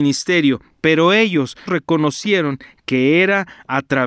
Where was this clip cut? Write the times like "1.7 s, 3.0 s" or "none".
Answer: 1.7 s